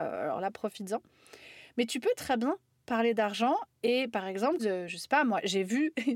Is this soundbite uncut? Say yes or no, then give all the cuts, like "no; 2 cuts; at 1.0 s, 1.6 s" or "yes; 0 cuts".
no; 1 cut; at 4.6 s